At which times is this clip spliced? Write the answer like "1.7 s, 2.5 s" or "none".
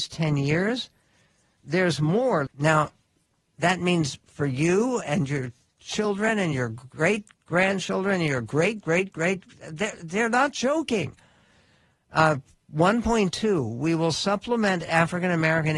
2.5 s, 8.8 s